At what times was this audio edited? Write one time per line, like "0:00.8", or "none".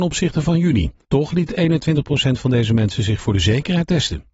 0:01.0

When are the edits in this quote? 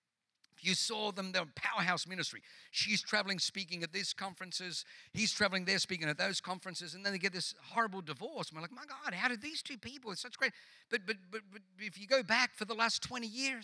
none

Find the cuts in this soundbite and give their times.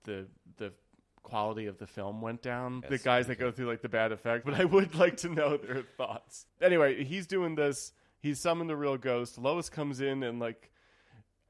0:02.8
0:04.4

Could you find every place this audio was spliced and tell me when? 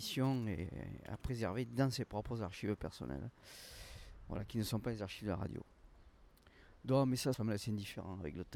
0:07.3

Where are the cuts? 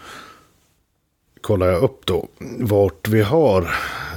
none

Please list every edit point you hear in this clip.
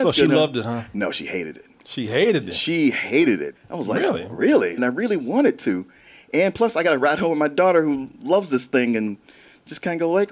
0:03.5
0:04.8

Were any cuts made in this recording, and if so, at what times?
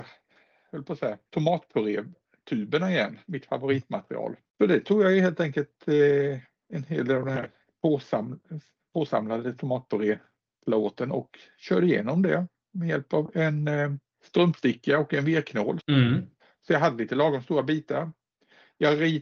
0:04.5
0:15.8

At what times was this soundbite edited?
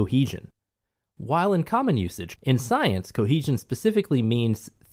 0:02.4

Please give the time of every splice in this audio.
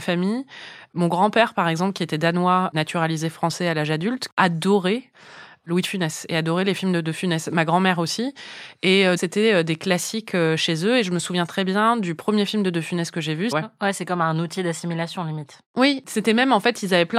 0:09.2
0:13.5
0:15.7

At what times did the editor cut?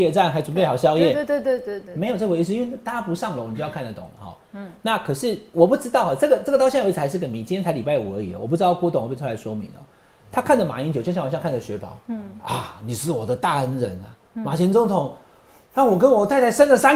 none

